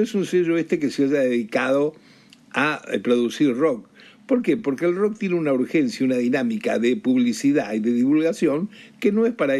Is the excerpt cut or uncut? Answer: uncut